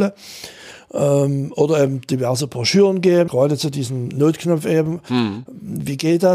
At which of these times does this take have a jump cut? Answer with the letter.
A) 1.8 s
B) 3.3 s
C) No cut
B